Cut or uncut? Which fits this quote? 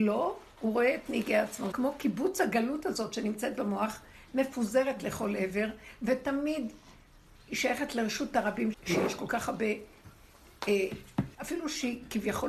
cut